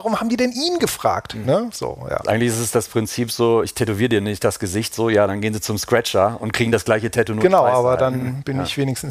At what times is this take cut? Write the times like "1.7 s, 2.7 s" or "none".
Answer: none